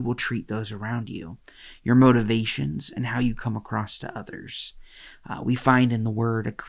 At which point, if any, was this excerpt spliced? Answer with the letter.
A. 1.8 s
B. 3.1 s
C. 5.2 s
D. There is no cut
D